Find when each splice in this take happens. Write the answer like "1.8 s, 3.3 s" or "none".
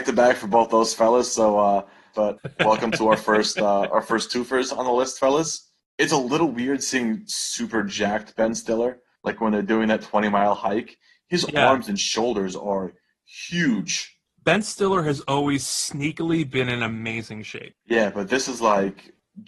2.1 s